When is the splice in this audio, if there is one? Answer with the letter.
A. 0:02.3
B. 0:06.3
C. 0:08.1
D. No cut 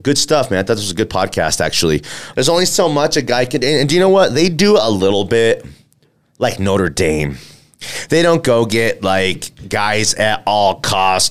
A